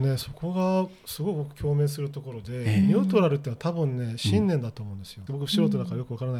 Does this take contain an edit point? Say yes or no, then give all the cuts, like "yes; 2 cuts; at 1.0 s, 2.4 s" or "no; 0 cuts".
yes; 1 cut; at 5.3 s